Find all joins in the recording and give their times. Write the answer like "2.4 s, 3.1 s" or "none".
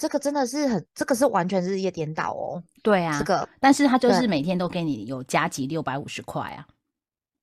none